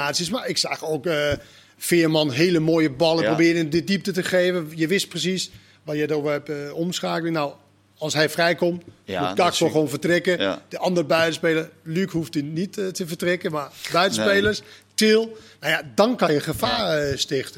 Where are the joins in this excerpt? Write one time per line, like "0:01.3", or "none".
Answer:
none